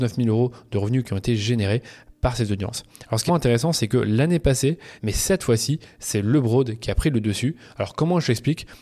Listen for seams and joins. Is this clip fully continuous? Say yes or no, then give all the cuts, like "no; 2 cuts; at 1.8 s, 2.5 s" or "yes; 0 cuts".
no; 2 cuts; at 3.3 s, 5.0 s